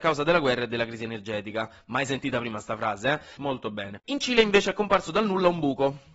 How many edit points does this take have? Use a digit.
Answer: 1